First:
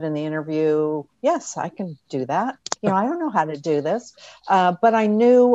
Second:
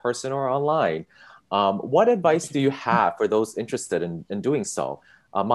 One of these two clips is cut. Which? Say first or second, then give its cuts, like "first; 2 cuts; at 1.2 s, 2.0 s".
first; 1 cut; at 2.8 s